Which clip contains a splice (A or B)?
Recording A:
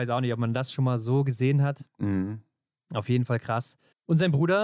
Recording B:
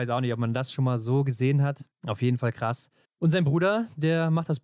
B